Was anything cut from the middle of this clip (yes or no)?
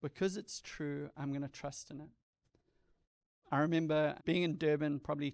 yes